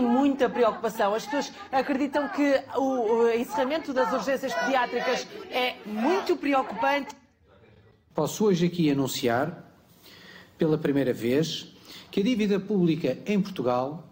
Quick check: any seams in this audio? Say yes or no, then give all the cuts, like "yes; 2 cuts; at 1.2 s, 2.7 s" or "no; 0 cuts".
no; 0 cuts